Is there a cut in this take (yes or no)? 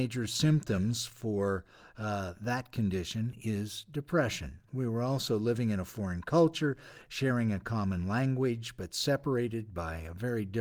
yes